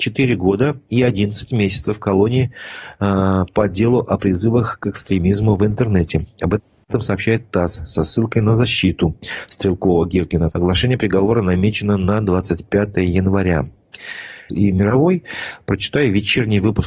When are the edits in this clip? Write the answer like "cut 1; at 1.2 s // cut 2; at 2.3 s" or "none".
cut 1; at 10.5 s // cut 2; at 14.5 s

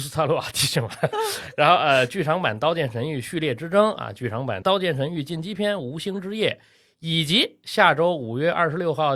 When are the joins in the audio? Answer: cut 1; at 1.1 s

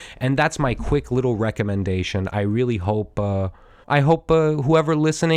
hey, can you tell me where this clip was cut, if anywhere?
cut 1; at 3.8 s

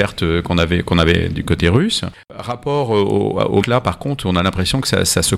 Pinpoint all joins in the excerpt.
cut 1; at 3.6 s

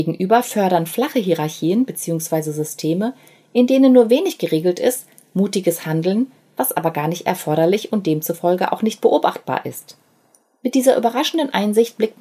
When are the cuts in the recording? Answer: none

